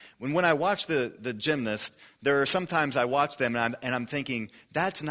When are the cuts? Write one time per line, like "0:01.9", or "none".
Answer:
none